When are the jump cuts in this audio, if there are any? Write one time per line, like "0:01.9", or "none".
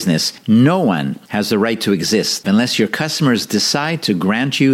0:02.4